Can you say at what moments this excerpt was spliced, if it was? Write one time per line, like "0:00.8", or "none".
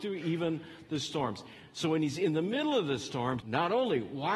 0:03.4

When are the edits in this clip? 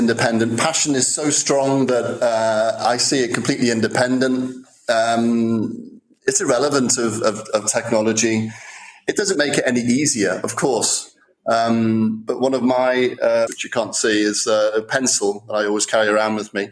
0:13.5

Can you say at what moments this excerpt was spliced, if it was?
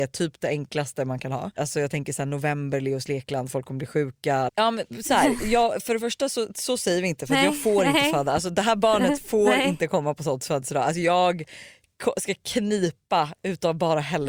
0:04.5

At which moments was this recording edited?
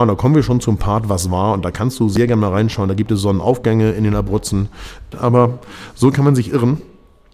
0:05.1

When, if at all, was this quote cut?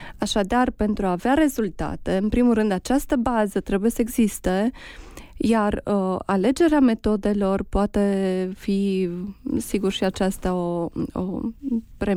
none

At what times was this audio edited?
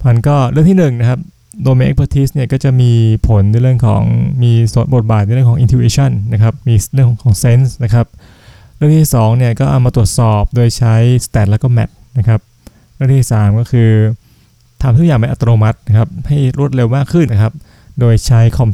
0:06.6
0:17.3

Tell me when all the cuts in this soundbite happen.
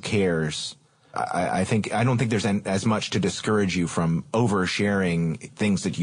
0:01.1

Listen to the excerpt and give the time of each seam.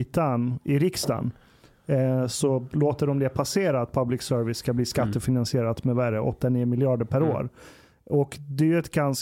none

